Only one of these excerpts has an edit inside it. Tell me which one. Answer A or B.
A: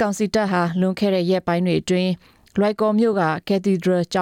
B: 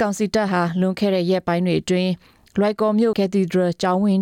B